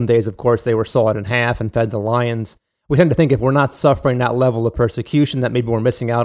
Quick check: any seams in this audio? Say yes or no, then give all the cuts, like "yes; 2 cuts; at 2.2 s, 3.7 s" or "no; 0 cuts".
no; 0 cuts